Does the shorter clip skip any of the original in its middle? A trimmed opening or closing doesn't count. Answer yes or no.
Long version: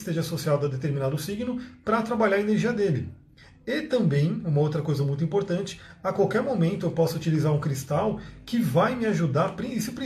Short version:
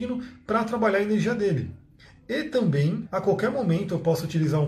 yes